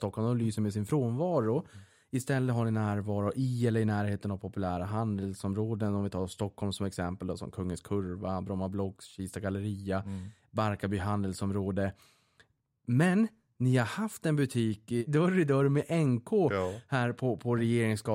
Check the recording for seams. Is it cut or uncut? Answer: uncut